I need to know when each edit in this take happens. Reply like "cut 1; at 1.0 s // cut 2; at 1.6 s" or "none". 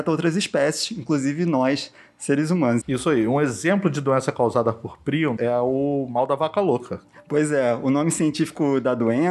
cut 1; at 2.8 s // cut 2; at 5.4 s